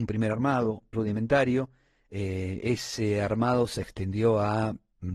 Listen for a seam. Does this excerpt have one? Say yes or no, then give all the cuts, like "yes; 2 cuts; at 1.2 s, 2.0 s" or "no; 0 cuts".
yes; 1 cut; at 0.9 s